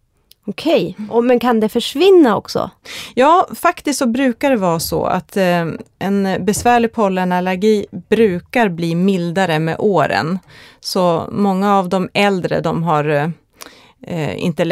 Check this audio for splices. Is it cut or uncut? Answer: uncut